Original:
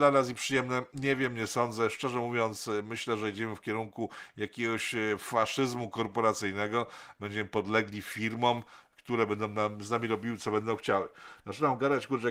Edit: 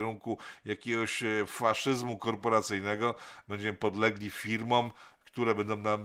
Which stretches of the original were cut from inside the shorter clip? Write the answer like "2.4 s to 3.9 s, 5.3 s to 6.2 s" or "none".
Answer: none